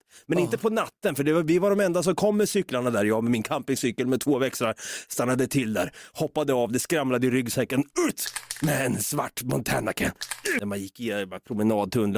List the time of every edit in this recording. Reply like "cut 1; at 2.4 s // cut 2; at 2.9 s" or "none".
cut 1; at 10.6 s

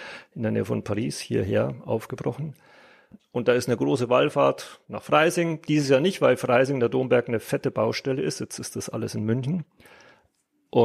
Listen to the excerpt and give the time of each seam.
none

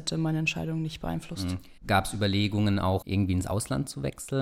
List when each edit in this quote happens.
cut 1; at 1.8 s // cut 2; at 3.0 s

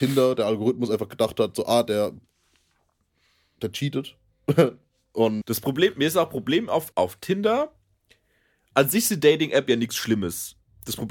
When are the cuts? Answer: cut 1; at 5.4 s // cut 2; at 6.9 s

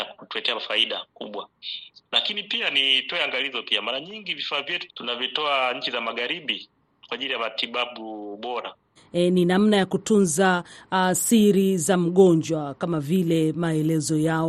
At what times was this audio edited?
cut 1; at 4.9 s // cut 2; at 9.0 s

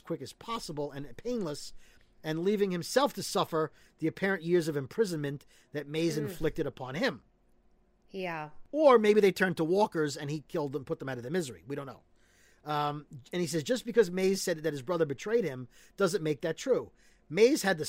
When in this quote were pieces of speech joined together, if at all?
none

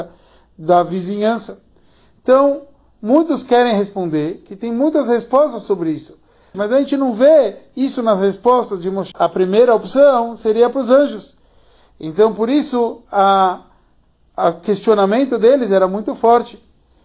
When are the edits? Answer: cut 1; at 6.5 s // cut 2; at 9.1 s

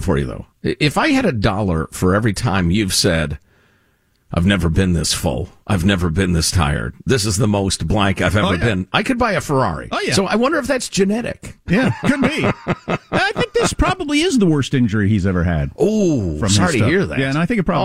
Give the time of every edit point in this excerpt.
none

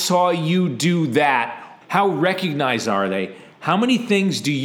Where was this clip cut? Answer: cut 1; at 1.8 s // cut 2; at 3.5 s

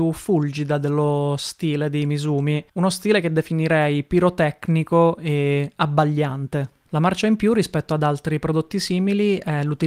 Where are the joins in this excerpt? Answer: cut 1; at 2.7 s // cut 2; at 6.9 s

